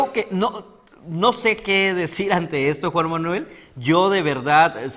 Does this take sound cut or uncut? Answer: uncut